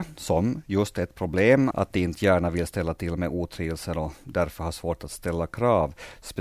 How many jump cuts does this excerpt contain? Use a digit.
1